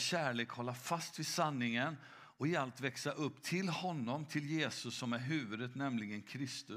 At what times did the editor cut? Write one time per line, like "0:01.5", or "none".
none